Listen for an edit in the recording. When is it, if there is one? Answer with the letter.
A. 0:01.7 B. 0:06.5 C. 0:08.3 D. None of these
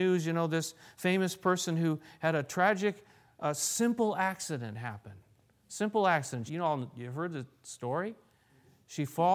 B